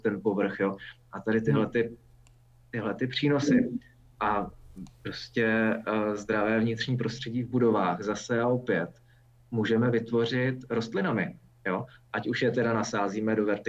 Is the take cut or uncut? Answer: uncut